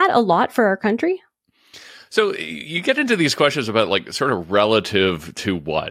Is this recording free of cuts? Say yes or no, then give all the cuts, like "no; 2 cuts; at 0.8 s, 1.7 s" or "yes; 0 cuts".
yes; 0 cuts